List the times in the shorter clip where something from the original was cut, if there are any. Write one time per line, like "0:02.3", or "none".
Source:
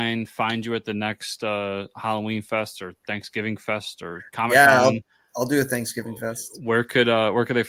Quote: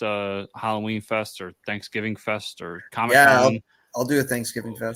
none